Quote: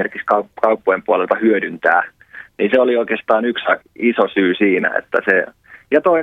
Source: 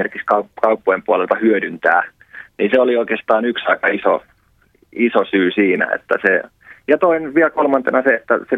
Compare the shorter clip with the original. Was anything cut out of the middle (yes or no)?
yes